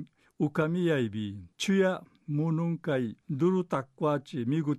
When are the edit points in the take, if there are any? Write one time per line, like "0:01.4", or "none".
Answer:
0:01.5
0:03.2